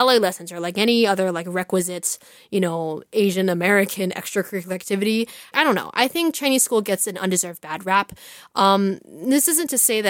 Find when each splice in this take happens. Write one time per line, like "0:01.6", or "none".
0:05.5